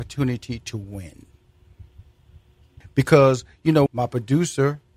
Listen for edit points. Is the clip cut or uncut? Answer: cut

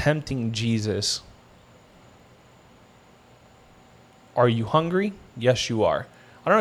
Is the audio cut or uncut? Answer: uncut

